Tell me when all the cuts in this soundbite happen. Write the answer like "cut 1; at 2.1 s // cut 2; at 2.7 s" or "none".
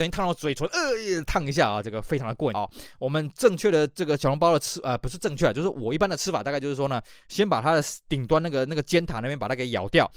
cut 1; at 2.5 s